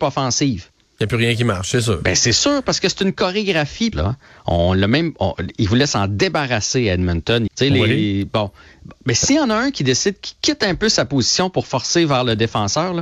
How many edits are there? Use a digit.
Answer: 2